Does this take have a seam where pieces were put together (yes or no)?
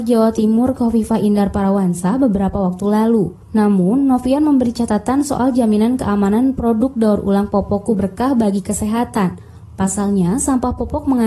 yes